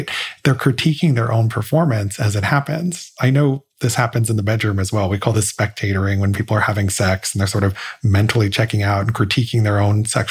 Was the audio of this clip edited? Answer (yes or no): no